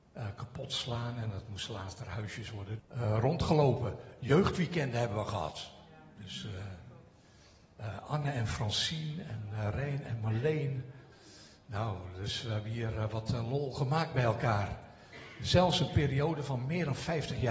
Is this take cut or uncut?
cut